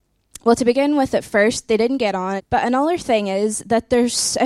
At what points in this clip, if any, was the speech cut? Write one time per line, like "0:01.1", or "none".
0:02.4